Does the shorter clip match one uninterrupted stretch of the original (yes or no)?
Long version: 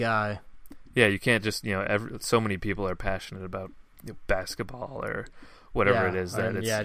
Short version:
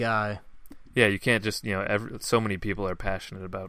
yes